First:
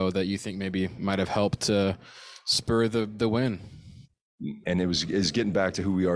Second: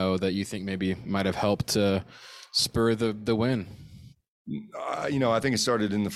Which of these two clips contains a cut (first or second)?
first